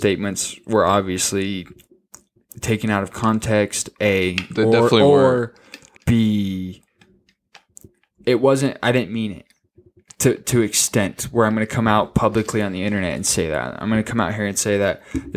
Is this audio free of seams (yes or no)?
no